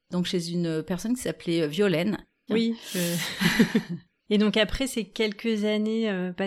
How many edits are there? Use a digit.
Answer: 2